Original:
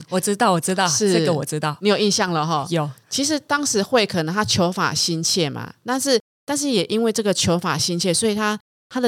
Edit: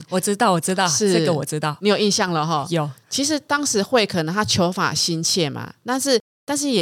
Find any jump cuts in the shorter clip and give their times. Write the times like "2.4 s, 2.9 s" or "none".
none